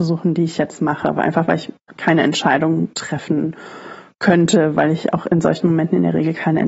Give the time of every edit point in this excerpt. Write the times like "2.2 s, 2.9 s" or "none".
none